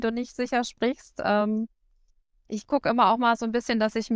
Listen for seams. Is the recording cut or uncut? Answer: uncut